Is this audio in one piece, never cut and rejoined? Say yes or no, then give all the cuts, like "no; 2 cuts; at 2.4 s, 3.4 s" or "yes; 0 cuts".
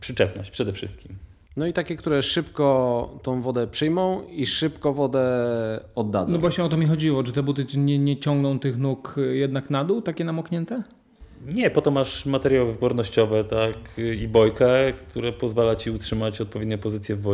yes; 0 cuts